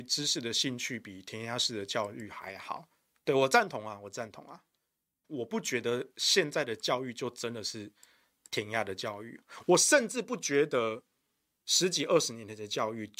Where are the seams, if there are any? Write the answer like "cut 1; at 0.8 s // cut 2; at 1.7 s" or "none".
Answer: cut 1; at 5.2 s